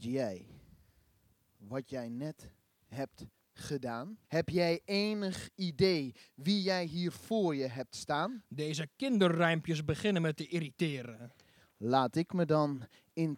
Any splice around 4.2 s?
yes; 1 cut; at 4.2 s

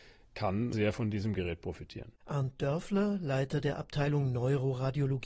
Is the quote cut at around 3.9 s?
no; 1 cut; at 2.2 s

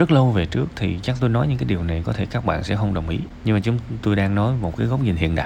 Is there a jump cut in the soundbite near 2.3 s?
no; 1 cut; at 4.0 s

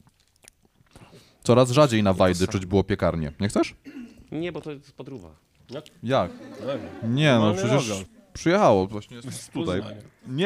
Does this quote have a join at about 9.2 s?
yes; 2 cuts; at 8.1 s, 9.2 s

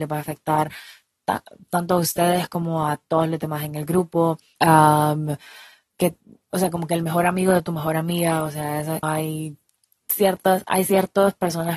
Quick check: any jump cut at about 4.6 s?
yes; 2 cuts; at 4.6 s, 9.0 s

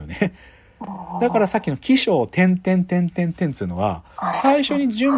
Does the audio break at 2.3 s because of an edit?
no; 0 cuts

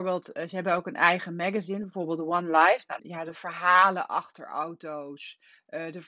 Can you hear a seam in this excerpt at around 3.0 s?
yes; 1 cut; at 3.0 s

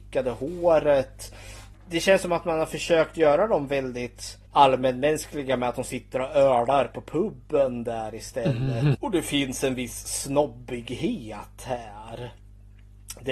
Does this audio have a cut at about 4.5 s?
yes; 3 cuts; at 1.7 s, 4.5 s, 8.9 s

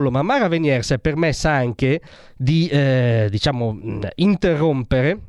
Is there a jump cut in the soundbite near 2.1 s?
no; 0 cuts

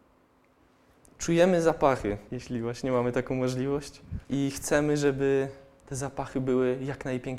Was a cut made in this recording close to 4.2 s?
yes; 2 cuts; at 2.3 s, 4.2 s

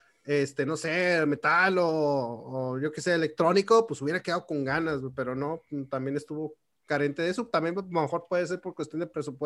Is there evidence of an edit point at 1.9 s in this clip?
no; 0 cuts

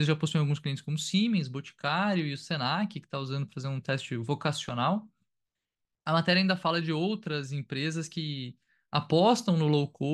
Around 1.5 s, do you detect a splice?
no; 1 cut; at 6.0 s

